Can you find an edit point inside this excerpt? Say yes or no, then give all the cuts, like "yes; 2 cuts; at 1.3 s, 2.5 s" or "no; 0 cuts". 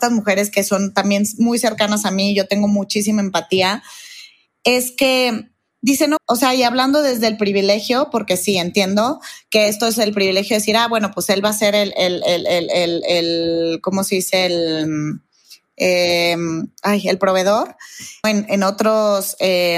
yes; 2 cuts; at 6.2 s, 18.2 s